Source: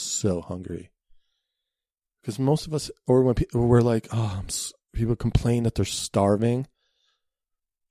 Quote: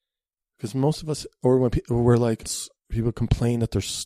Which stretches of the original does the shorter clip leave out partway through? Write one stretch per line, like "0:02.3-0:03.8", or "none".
0:04.1-0:04.5